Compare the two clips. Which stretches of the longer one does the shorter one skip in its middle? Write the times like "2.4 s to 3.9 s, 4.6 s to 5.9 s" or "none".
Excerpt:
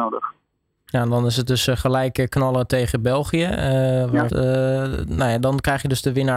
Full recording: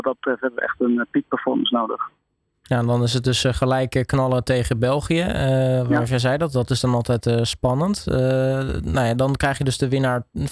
6.1 s to 8.0 s